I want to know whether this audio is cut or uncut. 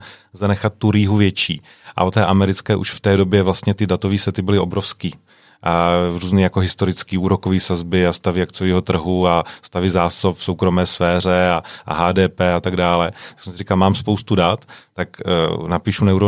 cut